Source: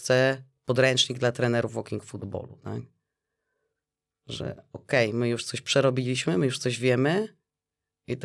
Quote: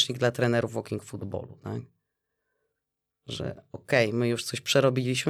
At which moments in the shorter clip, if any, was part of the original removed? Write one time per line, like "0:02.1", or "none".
none